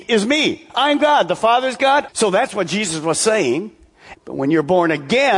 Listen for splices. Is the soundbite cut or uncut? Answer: cut